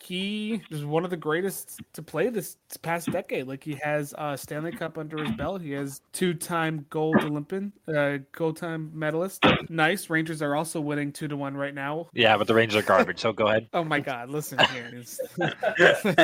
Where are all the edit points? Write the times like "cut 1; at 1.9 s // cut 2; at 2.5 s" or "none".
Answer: cut 1; at 6.1 s